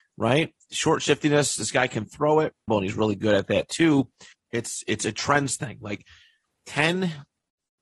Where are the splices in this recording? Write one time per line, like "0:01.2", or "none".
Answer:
0:02.7
0:04.3